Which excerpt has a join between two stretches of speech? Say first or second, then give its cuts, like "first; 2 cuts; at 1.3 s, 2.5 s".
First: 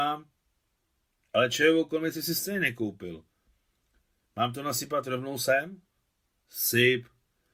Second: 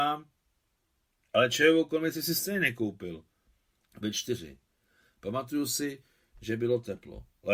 second; 1 cut; at 3.8 s